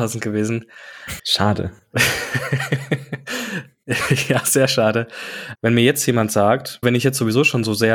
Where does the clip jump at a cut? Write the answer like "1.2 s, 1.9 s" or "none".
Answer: 1.2 s, 5.5 s, 6.8 s